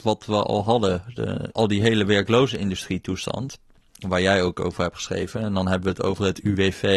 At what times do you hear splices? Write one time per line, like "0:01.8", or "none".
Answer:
0:01.5